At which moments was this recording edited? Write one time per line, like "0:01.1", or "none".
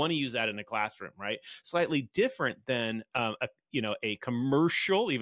none